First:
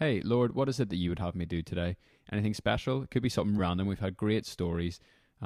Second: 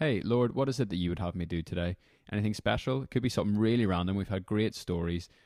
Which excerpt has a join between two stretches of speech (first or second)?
first